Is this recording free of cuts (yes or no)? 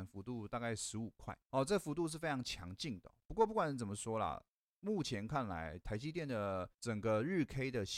yes